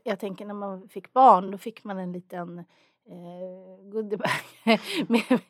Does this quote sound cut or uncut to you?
uncut